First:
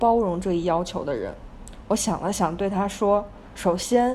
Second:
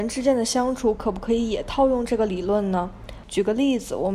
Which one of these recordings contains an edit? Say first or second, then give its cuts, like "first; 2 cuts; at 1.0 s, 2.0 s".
second; 1 cut; at 3.2 s